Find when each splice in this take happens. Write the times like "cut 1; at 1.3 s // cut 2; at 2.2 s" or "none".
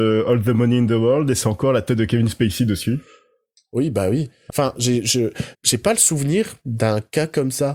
cut 1; at 4.5 s // cut 2; at 5.5 s